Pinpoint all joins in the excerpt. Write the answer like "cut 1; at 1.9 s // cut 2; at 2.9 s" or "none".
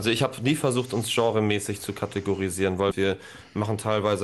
cut 1; at 2.9 s